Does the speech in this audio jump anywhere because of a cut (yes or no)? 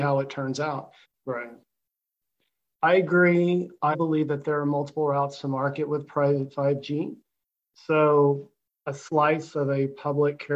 yes